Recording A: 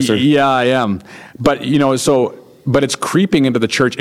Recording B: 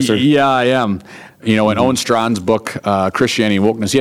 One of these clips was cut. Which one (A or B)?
B